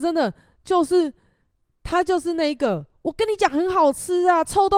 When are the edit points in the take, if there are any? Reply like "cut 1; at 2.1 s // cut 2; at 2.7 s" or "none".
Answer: none